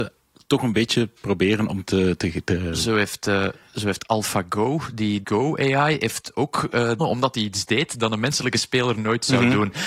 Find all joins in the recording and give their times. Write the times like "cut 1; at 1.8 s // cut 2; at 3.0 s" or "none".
cut 1; at 5.2 s // cut 2; at 7.0 s

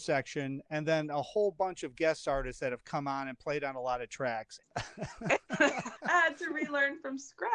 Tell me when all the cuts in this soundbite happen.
cut 1; at 4.6 s // cut 2; at 6.0 s

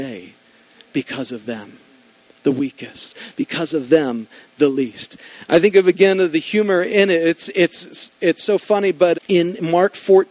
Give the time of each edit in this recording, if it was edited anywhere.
cut 1; at 9.1 s

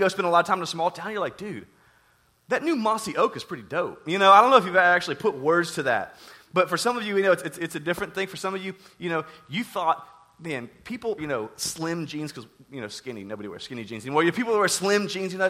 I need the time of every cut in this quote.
cut 1; at 11.2 s

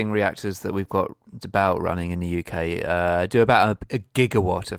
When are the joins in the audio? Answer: cut 1; at 1.4 s

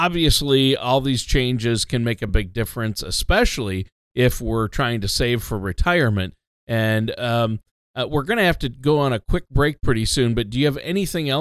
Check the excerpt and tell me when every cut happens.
none

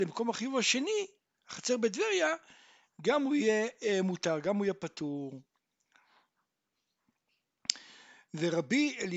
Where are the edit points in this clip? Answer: none

